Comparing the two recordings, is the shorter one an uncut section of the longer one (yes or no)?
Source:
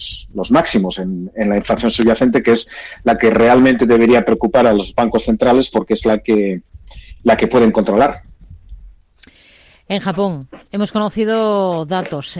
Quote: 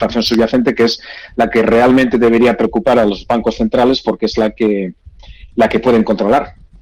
yes